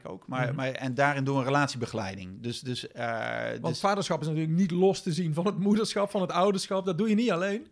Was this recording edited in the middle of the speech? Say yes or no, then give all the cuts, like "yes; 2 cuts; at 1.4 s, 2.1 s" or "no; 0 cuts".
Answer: no; 0 cuts